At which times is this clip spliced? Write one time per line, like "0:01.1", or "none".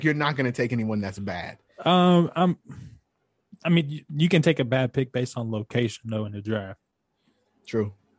none